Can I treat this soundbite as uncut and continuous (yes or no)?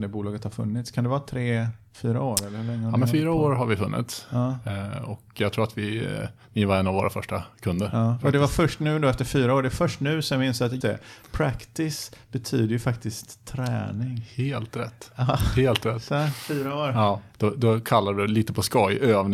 no